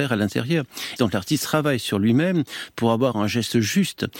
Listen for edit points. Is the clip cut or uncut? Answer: cut